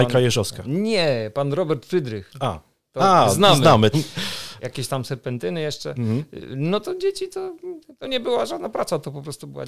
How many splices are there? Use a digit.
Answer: 1